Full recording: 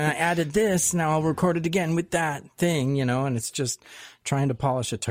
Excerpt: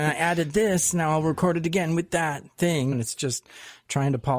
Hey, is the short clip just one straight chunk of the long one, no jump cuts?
no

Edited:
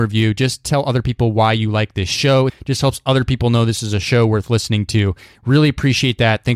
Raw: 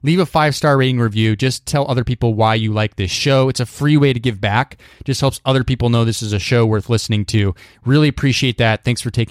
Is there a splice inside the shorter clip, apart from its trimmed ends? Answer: yes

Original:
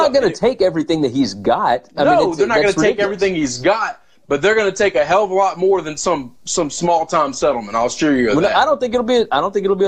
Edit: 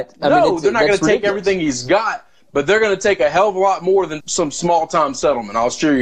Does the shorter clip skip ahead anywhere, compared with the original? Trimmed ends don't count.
yes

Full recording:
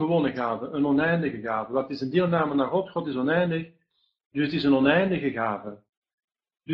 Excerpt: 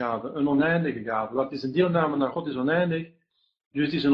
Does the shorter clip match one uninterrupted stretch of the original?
no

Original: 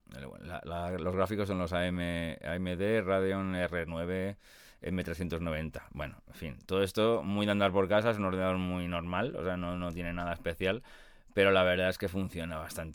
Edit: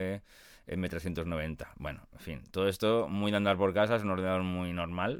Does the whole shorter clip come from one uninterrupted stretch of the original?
yes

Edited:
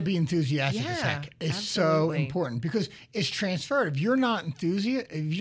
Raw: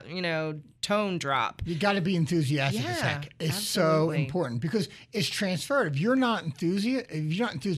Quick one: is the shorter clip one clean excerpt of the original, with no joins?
yes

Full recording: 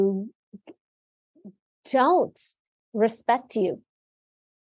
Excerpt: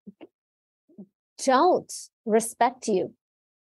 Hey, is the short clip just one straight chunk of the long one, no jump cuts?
no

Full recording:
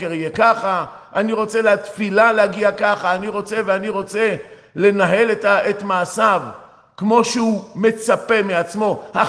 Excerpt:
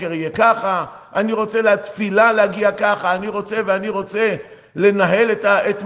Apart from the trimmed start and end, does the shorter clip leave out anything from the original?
no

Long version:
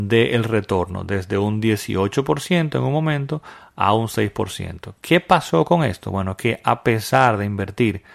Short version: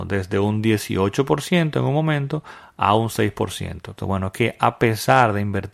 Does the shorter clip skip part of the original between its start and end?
yes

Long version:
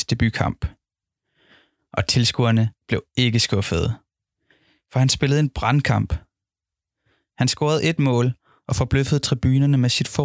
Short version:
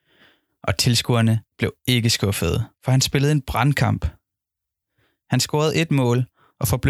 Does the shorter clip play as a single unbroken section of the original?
no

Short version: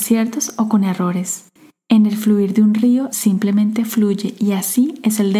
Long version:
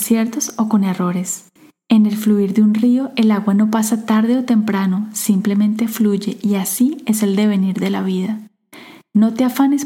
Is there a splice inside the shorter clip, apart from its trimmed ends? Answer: yes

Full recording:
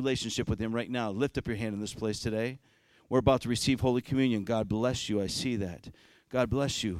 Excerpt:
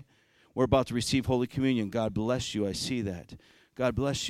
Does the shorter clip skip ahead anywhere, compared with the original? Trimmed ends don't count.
no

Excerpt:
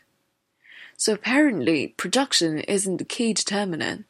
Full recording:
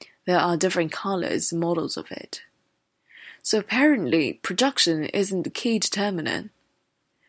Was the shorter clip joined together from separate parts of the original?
no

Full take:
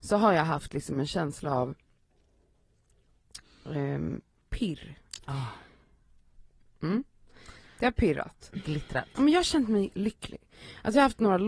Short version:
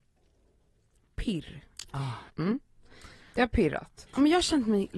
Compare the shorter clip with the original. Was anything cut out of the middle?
yes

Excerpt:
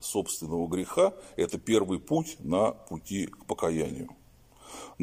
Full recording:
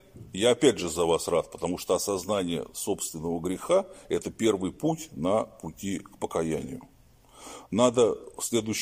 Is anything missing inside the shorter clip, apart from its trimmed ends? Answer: no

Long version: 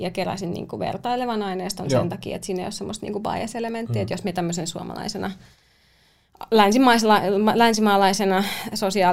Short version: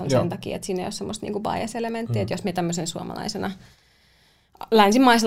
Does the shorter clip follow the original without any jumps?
yes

